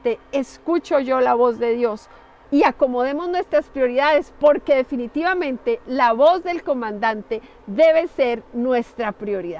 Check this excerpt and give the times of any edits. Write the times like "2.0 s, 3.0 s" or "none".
2.4 s